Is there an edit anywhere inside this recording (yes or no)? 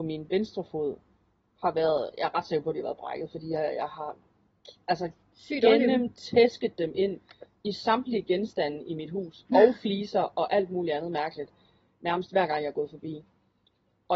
no